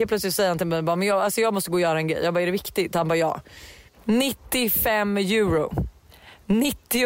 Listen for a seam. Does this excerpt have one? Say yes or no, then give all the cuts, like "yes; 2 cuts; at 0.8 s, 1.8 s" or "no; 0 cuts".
yes; 1 cut; at 3.9 s